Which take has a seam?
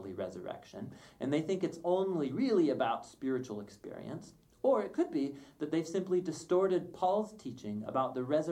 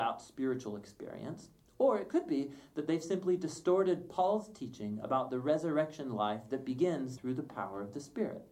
second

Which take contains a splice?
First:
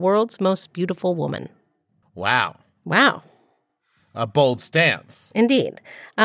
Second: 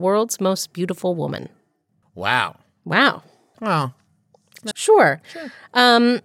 second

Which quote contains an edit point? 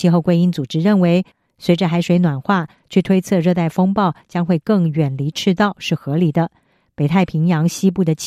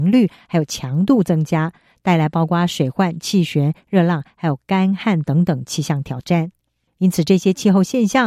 second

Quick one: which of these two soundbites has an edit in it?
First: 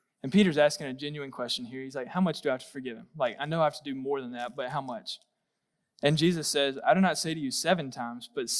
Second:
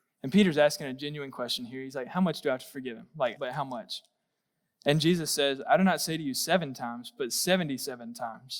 second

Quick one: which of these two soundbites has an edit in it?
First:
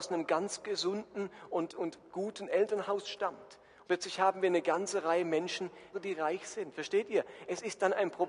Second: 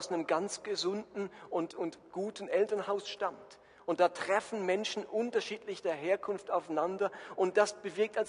first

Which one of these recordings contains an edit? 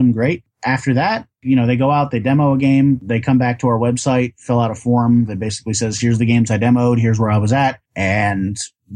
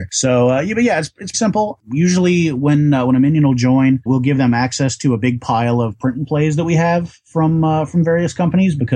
second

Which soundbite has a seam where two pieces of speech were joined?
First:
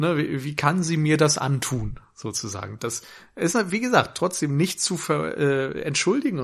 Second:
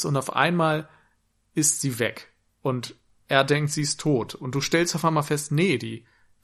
first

